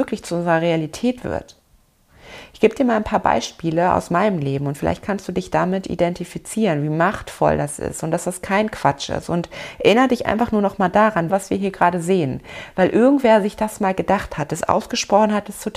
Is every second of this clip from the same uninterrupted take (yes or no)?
no